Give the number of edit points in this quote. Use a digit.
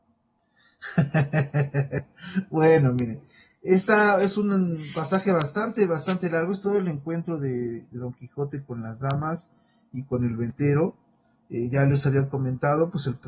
0